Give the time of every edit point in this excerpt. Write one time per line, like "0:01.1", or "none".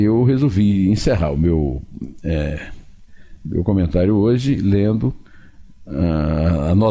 none